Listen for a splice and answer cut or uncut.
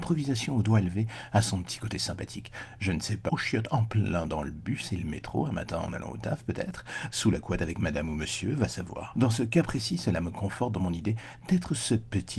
cut